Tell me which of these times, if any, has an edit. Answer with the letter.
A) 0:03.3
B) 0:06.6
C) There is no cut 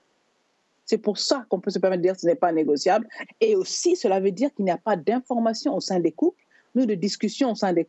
A